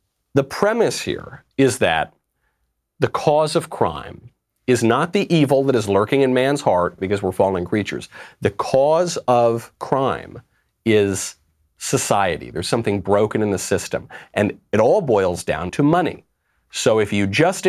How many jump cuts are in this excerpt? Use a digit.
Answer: 2